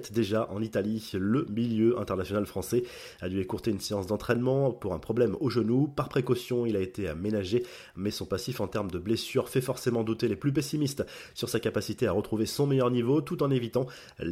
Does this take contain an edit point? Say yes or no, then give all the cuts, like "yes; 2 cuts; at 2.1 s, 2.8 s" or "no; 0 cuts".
no; 0 cuts